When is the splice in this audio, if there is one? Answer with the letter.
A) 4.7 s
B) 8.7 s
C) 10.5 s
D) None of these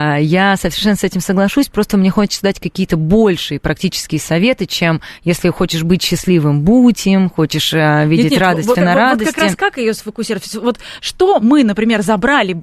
B